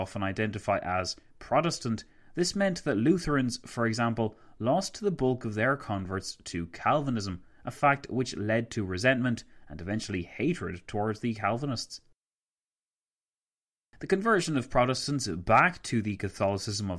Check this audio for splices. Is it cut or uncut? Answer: uncut